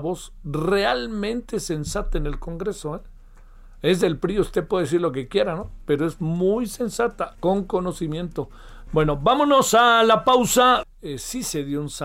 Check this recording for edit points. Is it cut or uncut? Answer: cut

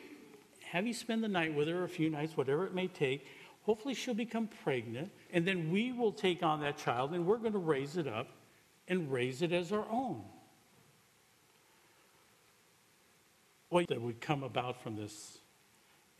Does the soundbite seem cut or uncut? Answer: cut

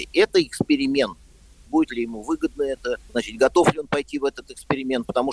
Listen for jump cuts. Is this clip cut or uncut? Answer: cut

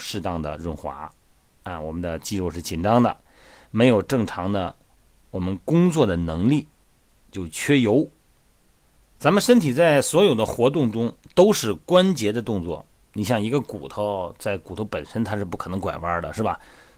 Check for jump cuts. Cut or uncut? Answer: uncut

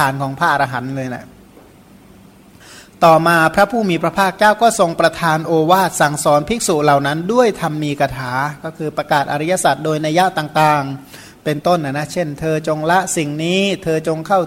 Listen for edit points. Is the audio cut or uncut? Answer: uncut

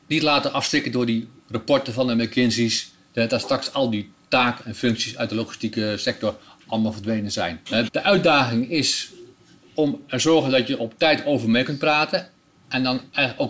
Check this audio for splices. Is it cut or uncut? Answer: cut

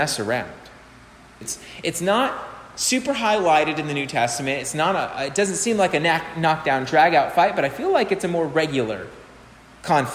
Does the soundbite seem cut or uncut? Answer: cut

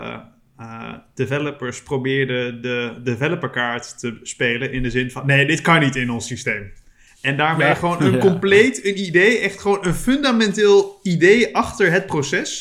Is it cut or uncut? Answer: uncut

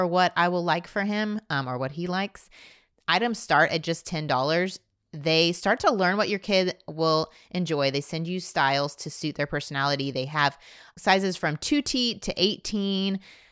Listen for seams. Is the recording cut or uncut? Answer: uncut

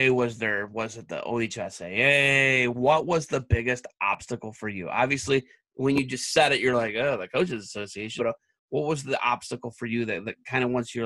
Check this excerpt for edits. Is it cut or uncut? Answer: cut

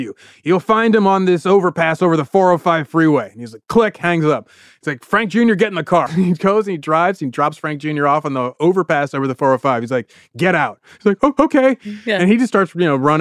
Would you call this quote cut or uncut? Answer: cut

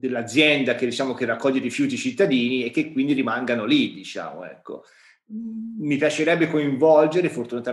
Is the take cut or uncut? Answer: uncut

